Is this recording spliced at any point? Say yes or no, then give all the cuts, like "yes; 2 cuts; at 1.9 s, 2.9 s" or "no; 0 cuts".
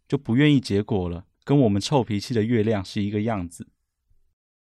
yes; 1 cut; at 1.3 s